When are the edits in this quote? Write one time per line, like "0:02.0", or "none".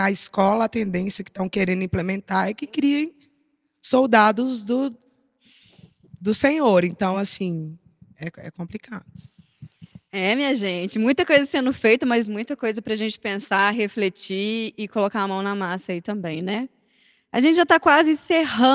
none